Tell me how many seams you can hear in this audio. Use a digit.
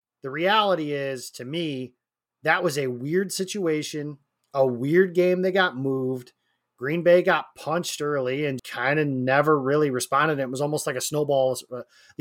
1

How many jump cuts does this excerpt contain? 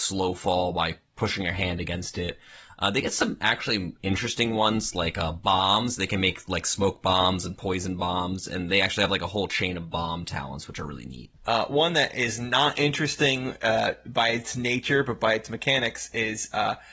1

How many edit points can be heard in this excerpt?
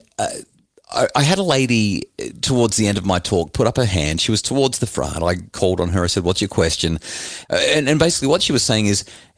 1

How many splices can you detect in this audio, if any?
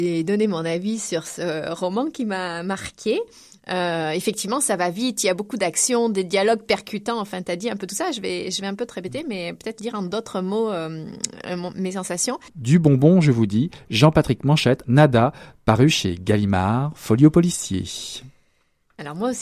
2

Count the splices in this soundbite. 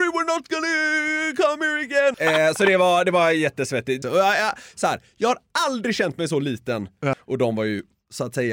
3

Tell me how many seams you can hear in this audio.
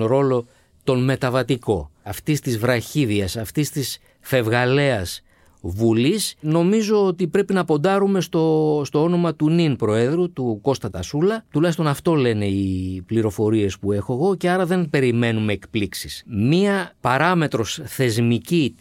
0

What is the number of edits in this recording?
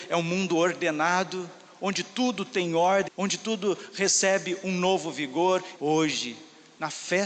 2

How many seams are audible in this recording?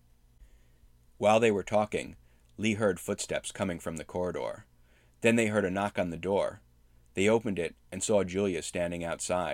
0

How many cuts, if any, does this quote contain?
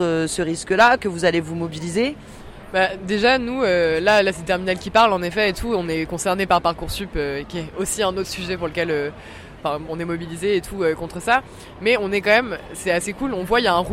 0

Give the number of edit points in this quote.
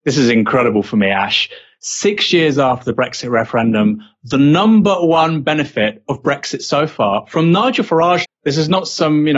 1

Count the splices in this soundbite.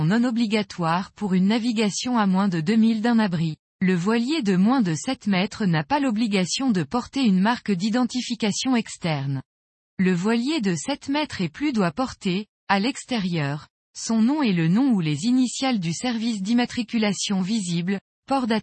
1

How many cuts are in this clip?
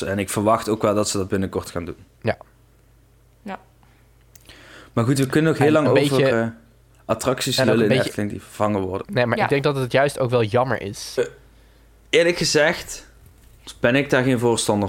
3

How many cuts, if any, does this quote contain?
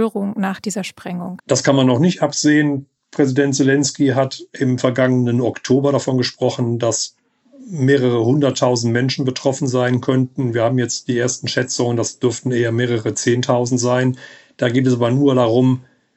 1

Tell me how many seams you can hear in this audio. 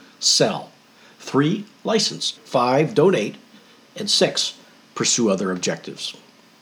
1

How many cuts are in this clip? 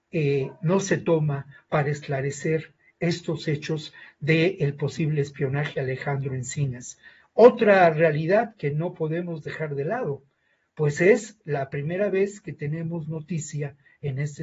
0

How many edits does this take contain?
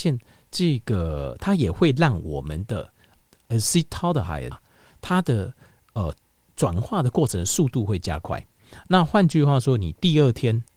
1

